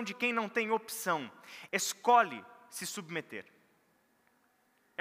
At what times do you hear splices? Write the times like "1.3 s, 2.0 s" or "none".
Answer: 1.7 s